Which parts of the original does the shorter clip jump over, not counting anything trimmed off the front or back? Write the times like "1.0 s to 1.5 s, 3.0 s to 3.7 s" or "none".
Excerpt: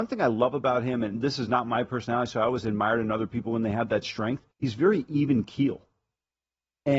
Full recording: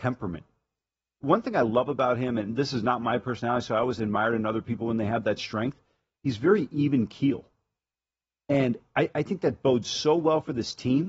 5.9 s to 6.1 s

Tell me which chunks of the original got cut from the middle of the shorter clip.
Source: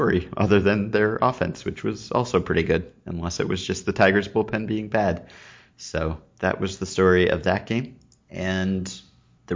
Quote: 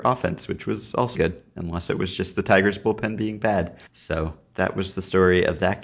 2.3 s to 2.6 s, 5.4 s to 5.7 s

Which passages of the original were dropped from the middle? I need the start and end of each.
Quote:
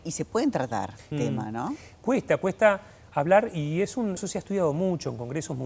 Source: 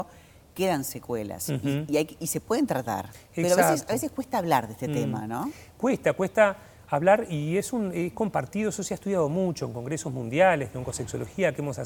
3.3 s to 4.9 s, 7.9 s to 8.7 s

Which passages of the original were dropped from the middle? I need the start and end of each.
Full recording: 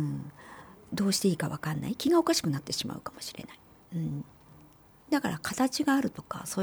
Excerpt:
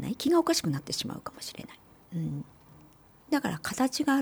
none

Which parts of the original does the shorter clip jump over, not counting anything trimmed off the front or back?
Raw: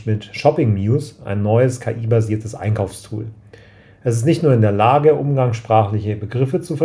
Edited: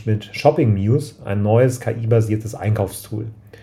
none

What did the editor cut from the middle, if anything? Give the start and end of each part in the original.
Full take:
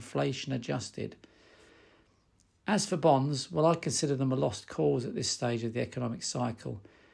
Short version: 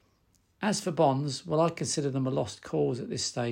none

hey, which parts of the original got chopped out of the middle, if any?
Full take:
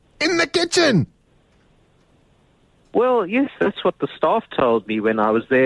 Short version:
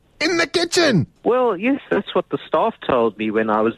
1.2 s to 2.9 s

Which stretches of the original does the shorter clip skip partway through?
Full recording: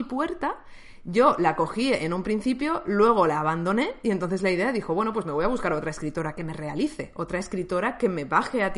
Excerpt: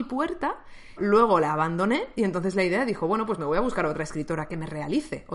1.0 s to 2.8 s

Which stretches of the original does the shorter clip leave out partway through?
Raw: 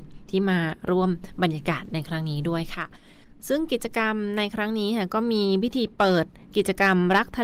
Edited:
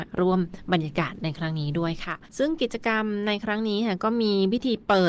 3.0 s to 3.4 s

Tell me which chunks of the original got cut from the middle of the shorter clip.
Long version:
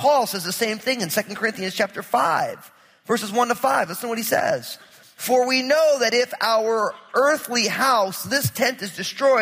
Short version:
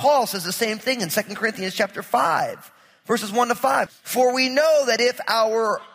3.9 s to 5.0 s

